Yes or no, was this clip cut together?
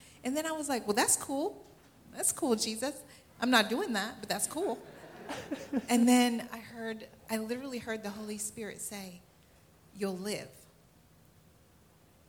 no